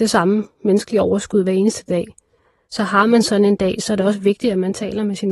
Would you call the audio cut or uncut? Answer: uncut